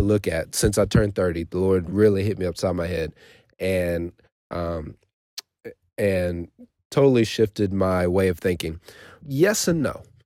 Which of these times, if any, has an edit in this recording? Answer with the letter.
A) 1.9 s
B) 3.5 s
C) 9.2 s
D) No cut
C